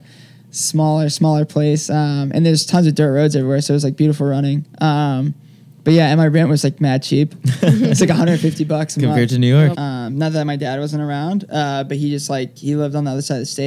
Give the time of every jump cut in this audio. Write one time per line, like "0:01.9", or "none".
0:09.7